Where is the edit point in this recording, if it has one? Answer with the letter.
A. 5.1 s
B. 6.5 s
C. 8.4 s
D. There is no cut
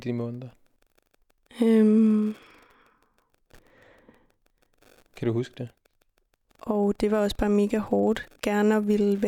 B